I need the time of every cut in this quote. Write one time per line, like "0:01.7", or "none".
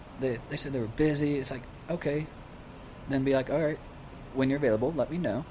none